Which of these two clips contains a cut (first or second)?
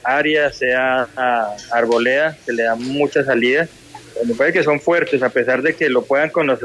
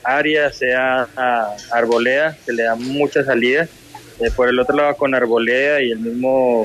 second